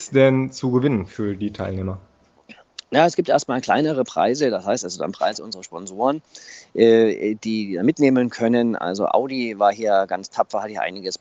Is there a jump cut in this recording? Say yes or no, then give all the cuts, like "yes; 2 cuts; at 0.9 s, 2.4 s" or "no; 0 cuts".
no; 0 cuts